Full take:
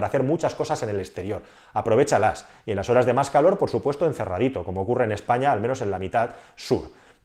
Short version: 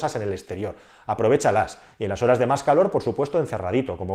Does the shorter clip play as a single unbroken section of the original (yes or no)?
yes